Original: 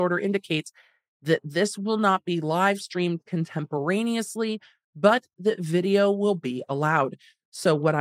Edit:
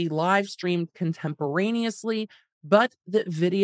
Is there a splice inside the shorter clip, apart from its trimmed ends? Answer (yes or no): no